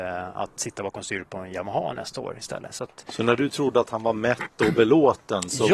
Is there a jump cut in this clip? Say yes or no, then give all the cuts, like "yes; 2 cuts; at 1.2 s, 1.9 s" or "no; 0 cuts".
no; 0 cuts